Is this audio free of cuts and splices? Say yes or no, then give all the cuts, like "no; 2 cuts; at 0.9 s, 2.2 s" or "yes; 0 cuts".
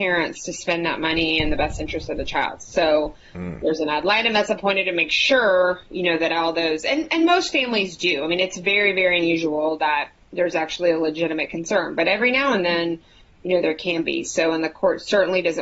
yes; 0 cuts